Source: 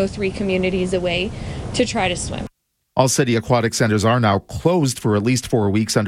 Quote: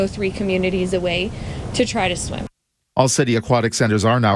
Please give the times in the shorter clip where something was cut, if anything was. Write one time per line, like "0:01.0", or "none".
none